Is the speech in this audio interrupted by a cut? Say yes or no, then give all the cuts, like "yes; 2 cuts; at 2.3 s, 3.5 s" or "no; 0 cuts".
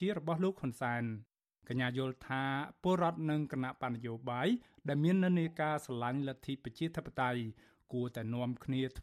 no; 0 cuts